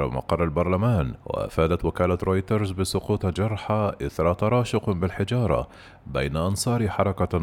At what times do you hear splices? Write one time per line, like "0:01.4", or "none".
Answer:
0:01.2